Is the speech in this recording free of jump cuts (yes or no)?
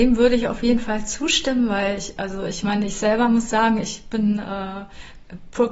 yes